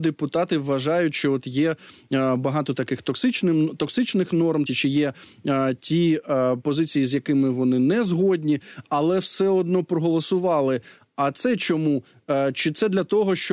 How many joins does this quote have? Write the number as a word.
one